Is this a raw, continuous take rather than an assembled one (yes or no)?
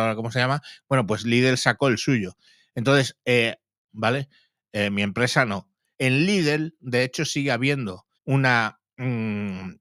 no